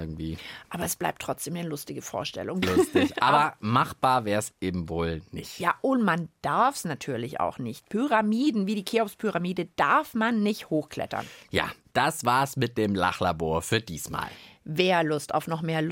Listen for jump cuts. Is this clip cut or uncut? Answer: cut